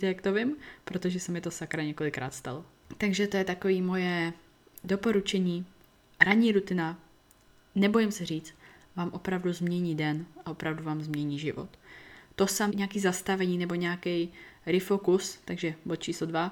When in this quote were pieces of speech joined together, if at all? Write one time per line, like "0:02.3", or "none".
0:12.7